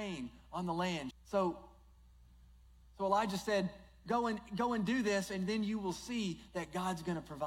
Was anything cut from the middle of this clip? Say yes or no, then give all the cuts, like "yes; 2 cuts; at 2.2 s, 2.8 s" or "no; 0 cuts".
yes; 1 cut; at 1.1 s